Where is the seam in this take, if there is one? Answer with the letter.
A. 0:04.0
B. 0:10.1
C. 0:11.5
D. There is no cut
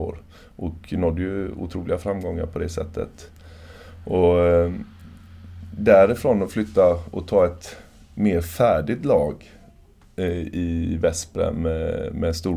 D